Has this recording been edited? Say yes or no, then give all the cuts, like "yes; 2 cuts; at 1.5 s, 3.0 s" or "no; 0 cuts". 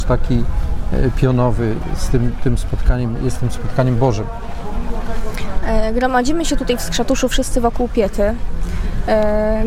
no; 0 cuts